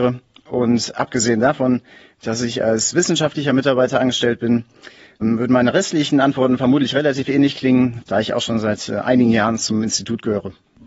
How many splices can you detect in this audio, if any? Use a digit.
2